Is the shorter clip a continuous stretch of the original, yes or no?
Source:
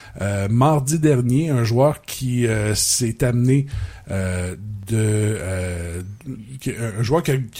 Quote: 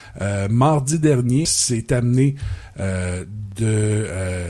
no